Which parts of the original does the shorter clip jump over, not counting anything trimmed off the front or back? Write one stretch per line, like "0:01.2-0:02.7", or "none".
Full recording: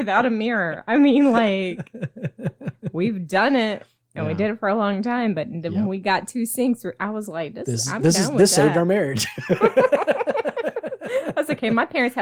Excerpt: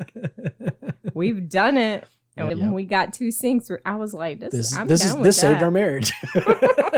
0:04.3-0:05.6